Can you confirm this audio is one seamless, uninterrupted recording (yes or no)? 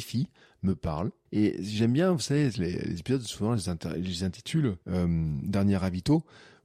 no